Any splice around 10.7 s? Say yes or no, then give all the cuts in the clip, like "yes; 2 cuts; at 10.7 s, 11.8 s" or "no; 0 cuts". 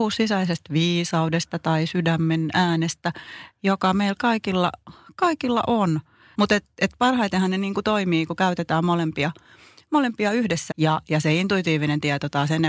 yes; 2 cuts; at 6.3 s, 10.7 s